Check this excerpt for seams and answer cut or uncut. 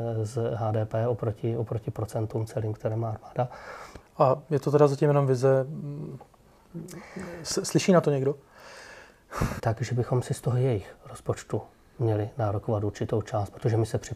cut